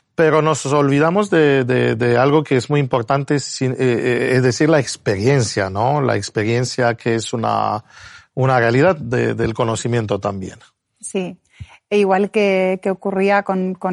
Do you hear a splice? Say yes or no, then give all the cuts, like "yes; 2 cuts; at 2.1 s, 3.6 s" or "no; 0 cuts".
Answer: no; 0 cuts